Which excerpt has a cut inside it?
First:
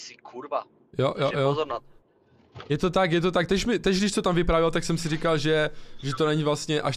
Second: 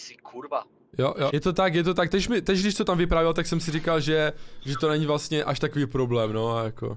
second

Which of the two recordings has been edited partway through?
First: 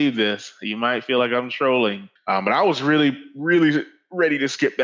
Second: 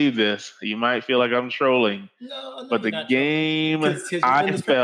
first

